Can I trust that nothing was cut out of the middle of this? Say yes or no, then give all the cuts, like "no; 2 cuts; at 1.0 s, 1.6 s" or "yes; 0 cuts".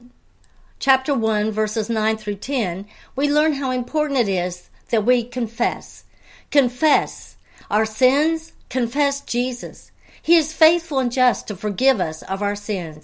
yes; 0 cuts